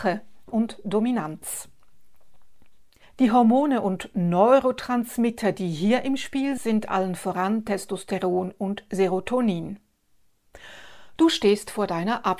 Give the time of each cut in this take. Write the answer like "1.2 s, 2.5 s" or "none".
6.6 s, 11.2 s